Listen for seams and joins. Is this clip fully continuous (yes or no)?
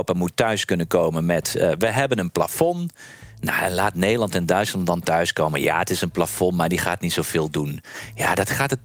yes